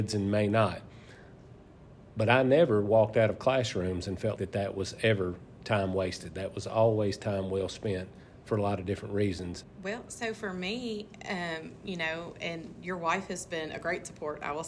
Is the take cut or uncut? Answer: cut